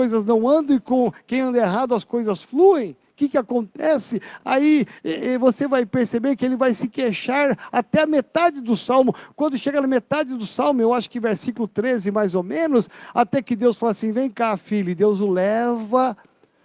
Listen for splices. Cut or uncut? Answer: uncut